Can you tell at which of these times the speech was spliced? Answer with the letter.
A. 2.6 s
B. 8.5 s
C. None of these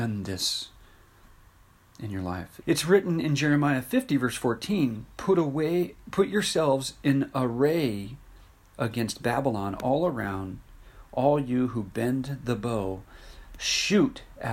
A